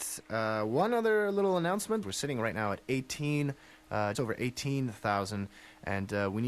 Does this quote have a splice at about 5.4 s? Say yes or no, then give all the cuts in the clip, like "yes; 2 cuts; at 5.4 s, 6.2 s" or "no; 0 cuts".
no; 2 cuts; at 2.0 s, 4.1 s